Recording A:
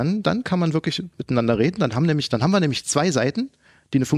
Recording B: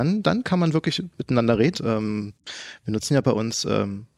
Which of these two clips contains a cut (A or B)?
B